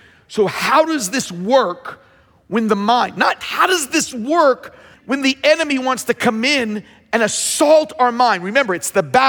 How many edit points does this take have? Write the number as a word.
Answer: two